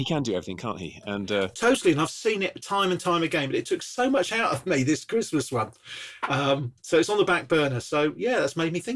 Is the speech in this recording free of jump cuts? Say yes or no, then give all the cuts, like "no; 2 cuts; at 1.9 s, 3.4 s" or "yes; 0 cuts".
yes; 0 cuts